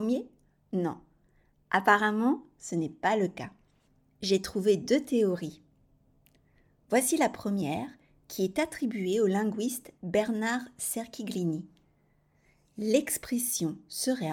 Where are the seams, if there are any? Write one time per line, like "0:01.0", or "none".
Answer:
none

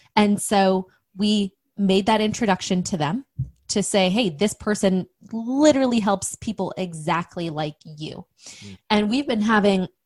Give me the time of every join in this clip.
0:08.8

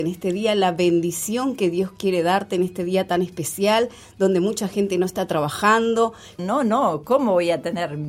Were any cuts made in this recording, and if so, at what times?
0:06.4

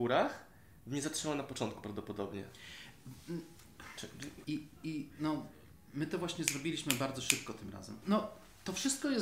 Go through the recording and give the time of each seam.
0:04.4
0:08.0

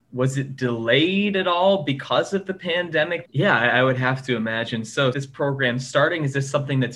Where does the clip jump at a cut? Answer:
0:03.2
0:05.1

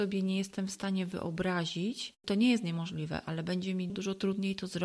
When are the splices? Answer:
0:03.9

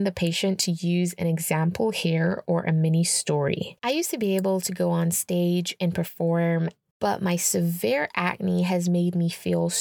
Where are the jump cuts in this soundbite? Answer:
0:03.8

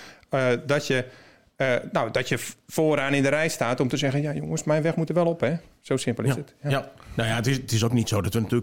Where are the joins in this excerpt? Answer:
none

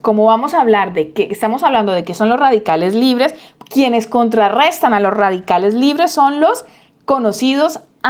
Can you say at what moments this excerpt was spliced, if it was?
none

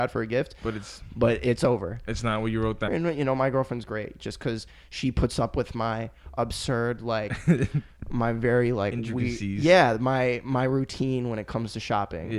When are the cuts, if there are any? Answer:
0:02.9

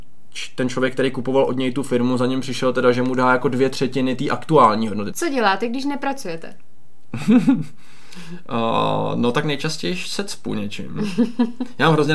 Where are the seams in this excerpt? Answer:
0:05.1

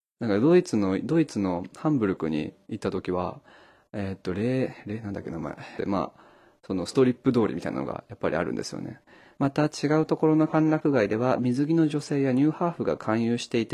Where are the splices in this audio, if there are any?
0:05.8
0:09.4

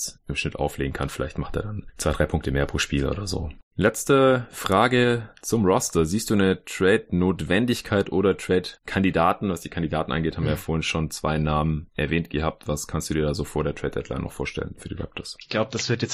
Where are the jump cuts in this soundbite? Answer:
0:03.6

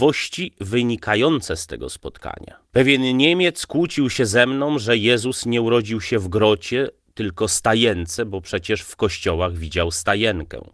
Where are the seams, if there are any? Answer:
0:02.7

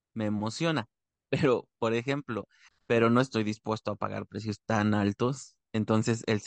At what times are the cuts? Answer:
0:02.7

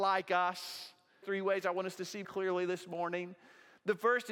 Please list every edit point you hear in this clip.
0:01.2
0:02.2

